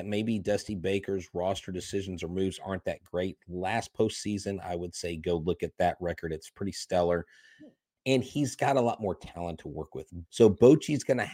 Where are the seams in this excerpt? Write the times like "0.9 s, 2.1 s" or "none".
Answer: 10.2 s